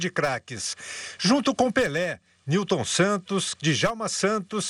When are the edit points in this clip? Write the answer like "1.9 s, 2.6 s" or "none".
3.5 s